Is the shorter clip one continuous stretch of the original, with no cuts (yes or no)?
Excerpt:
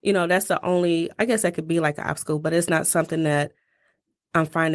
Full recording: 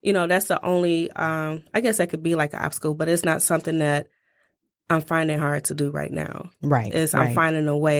no